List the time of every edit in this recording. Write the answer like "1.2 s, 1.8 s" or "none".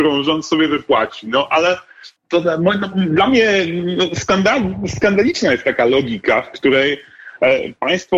2.2 s